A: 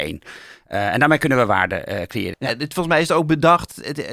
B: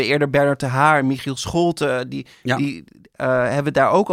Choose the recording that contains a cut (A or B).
A